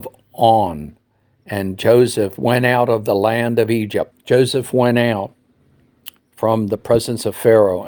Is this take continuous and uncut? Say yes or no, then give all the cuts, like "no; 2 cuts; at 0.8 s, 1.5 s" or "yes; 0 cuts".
no; 1 cut; at 4.1 s